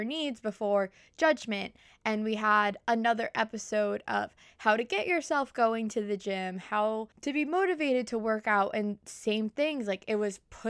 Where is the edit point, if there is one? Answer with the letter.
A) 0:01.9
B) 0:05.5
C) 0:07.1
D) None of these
C